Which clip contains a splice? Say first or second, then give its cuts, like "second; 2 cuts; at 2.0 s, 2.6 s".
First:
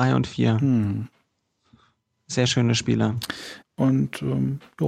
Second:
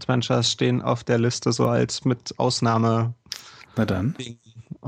first; 1 cut; at 3.6 s